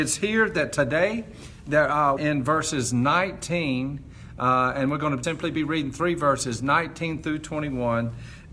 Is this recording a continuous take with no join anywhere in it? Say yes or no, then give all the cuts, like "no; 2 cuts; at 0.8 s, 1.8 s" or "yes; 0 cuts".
no; 2 cuts; at 2.2 s, 5.2 s